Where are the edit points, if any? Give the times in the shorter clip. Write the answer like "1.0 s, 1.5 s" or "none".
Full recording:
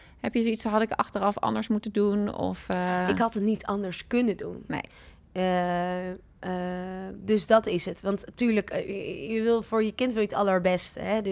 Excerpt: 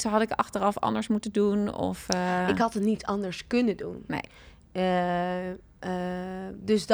none